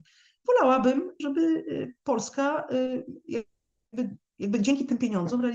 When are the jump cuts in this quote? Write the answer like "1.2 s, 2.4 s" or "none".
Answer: 1.2 s

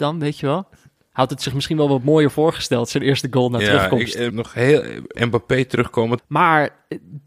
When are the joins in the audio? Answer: 4.3 s, 6.2 s

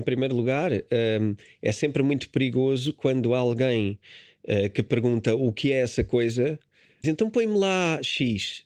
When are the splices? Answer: 7.0 s

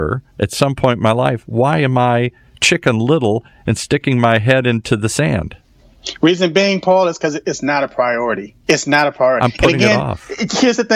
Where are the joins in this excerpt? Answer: 8.6 s

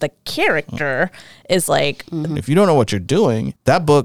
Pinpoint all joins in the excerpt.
2.3 s

